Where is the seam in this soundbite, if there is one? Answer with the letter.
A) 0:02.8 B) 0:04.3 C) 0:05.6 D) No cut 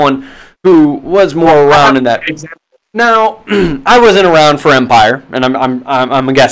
A